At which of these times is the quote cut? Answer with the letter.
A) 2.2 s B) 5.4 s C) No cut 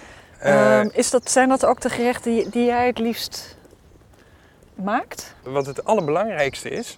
C